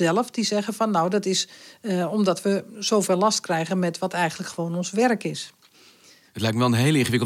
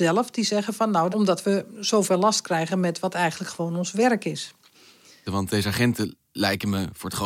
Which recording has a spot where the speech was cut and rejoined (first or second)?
second